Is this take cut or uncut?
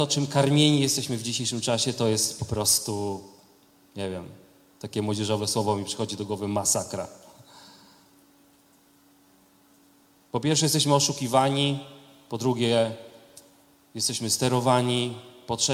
uncut